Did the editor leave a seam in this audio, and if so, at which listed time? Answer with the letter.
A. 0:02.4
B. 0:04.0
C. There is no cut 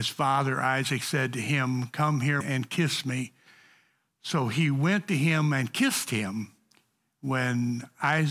A